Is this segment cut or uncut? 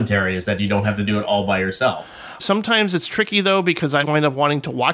cut